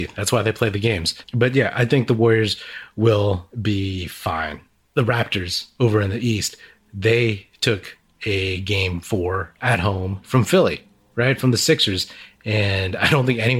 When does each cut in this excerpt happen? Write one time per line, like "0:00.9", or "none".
0:03.5